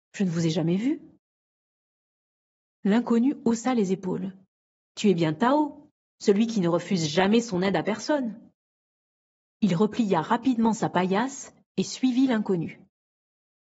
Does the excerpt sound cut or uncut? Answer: cut